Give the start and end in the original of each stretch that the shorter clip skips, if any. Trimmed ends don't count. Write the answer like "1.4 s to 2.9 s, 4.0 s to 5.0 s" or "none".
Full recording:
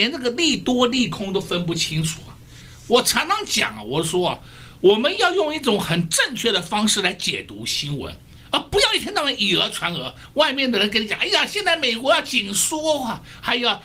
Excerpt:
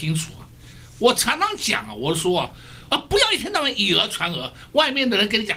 4.8 s to 8.5 s